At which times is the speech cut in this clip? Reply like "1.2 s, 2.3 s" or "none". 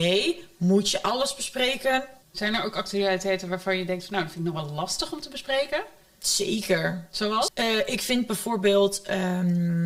2.2 s, 7.5 s

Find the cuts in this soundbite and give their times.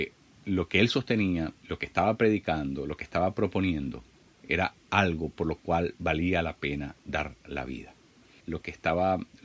8.4 s

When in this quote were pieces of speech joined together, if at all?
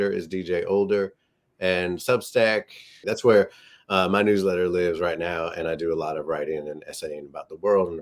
3.0 s

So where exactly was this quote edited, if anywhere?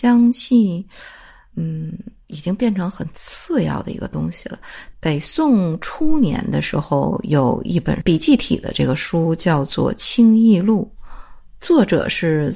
4.9 s

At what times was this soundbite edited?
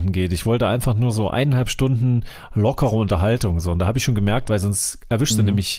4.5 s

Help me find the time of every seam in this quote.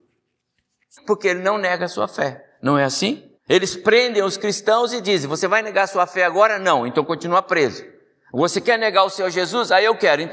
1.0 s, 3.4 s

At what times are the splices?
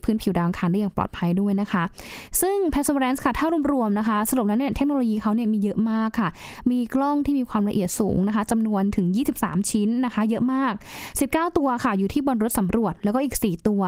none

